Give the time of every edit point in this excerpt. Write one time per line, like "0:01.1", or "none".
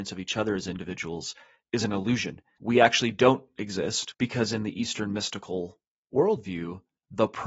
0:04.1